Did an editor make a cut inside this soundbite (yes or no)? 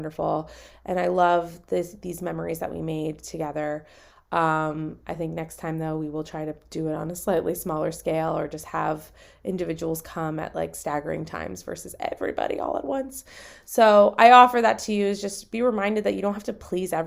no